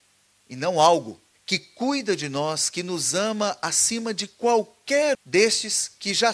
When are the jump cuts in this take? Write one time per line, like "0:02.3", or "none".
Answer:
0:01.3
0:05.1